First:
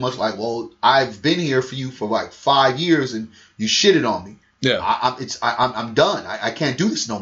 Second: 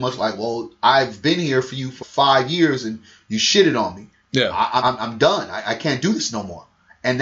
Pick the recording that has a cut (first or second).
second